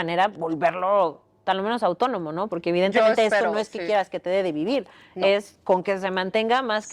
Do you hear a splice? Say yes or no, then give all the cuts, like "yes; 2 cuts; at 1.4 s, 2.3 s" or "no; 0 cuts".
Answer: no; 0 cuts